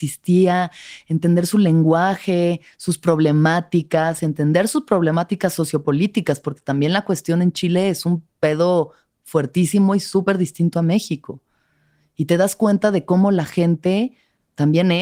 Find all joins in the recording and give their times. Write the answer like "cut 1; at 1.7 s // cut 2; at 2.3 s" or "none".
none

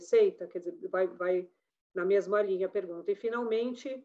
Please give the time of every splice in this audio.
none

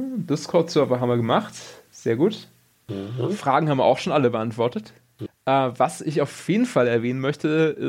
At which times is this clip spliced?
cut 1; at 5.3 s

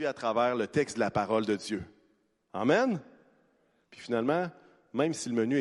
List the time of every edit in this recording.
cut 1; at 3.8 s

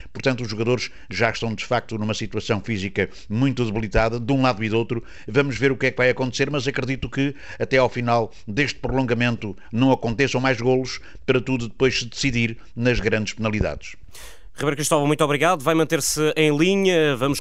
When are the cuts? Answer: none

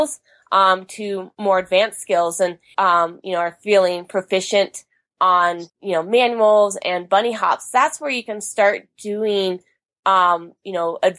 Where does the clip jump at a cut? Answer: cut 1; at 2.7 s // cut 2; at 5.7 s

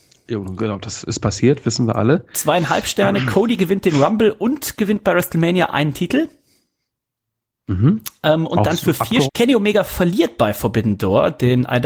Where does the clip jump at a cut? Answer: cut 1; at 9.3 s

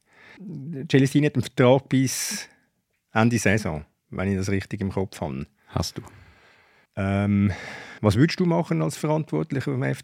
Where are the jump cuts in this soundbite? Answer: cut 1; at 6.9 s // cut 2; at 8.0 s

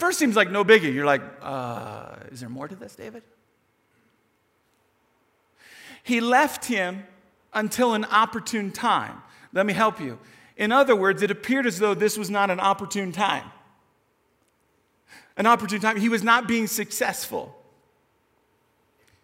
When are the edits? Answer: none

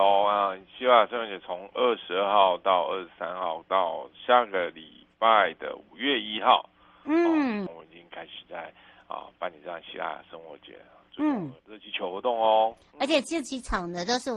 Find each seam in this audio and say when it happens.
cut 1; at 7.7 s // cut 2; at 11.6 s

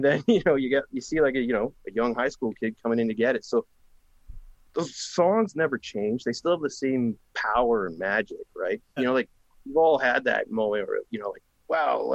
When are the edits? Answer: cut 1; at 9.0 s

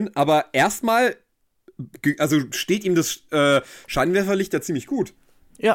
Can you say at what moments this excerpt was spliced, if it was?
none

